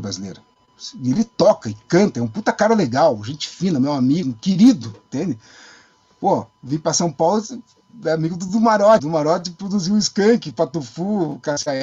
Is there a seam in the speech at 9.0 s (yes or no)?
yes